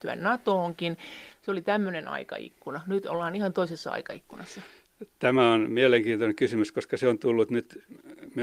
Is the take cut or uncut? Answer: uncut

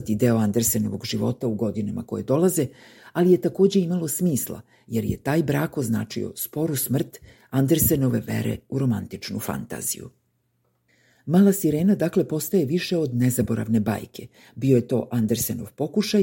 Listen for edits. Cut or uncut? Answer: uncut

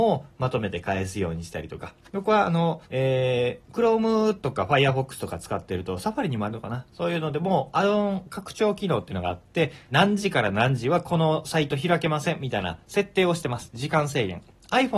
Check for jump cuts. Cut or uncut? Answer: cut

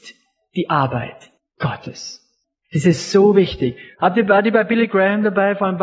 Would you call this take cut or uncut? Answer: cut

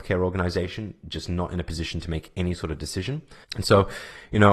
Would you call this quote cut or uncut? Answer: cut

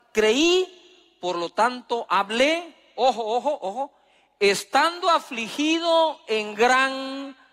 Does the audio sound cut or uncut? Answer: uncut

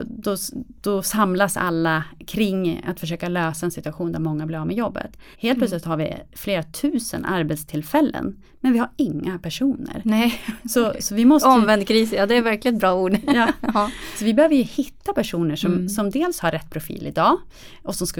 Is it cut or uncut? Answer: cut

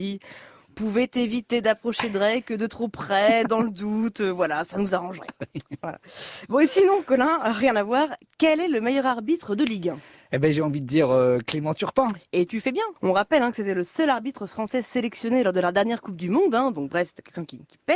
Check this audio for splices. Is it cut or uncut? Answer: uncut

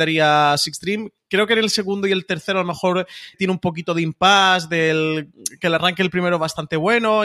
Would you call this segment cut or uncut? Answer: cut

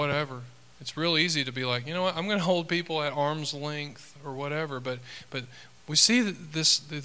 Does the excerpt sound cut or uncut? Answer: uncut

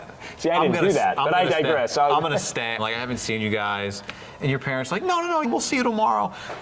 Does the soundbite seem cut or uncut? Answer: cut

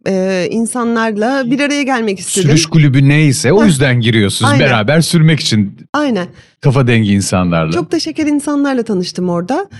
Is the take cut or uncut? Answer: uncut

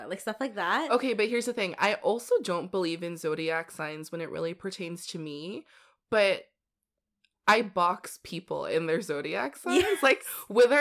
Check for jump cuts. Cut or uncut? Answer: uncut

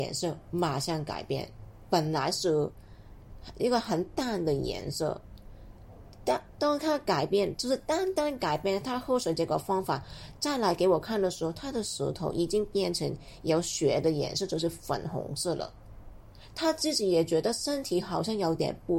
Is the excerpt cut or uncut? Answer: uncut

